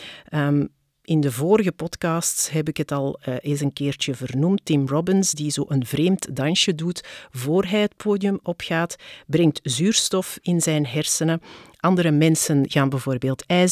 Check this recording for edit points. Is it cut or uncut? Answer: uncut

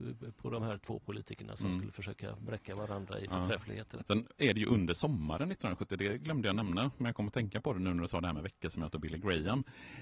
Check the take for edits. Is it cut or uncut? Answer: cut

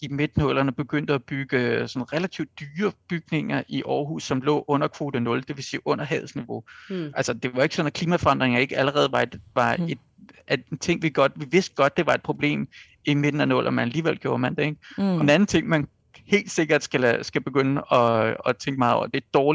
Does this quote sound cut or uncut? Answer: cut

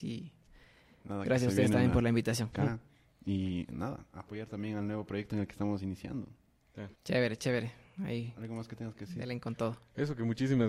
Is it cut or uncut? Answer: cut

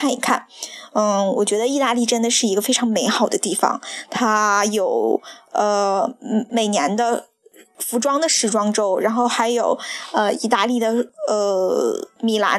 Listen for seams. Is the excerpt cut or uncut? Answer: uncut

